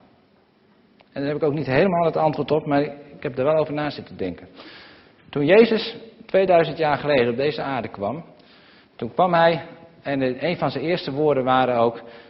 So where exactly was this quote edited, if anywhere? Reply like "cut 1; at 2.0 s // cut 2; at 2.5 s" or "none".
cut 1; at 5.2 s